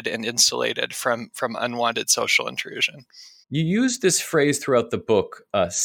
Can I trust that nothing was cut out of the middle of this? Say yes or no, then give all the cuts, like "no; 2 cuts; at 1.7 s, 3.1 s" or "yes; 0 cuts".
no; 1 cut; at 3.4 s